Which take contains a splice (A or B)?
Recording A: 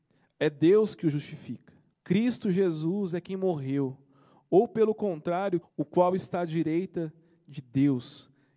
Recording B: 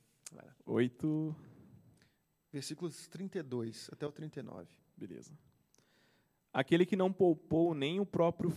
A